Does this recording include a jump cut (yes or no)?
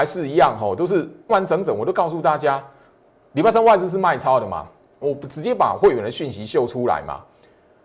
yes